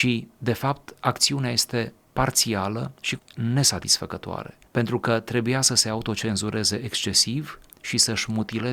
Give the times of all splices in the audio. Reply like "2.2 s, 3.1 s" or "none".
3.2 s, 4.7 s

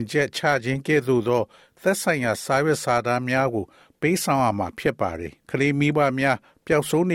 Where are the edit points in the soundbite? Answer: 5.4 s

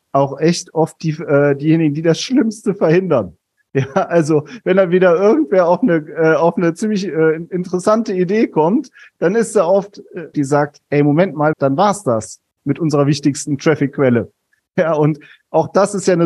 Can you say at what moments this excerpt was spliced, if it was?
9.1 s, 10.3 s, 11.5 s

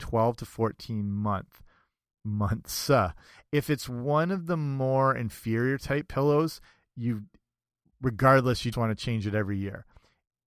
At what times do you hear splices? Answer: 8.7 s

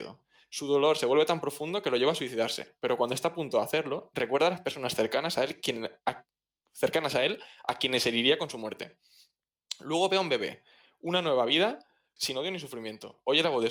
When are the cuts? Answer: 12.2 s

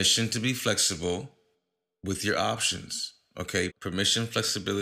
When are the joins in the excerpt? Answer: 3.7 s

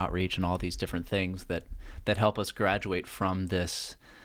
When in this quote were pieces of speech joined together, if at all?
none

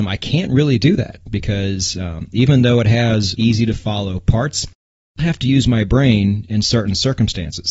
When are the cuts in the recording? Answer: 3.4 s, 5.2 s

